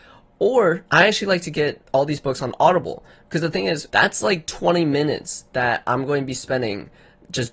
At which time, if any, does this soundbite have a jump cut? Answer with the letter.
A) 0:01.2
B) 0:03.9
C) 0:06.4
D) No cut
B